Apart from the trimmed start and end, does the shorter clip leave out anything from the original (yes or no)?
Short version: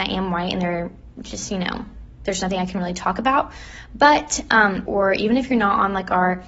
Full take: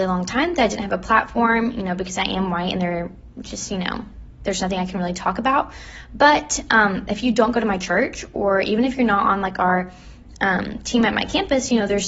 yes